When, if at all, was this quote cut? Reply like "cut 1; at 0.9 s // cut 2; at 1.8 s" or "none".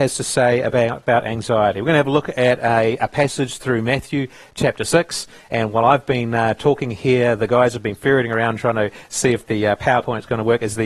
none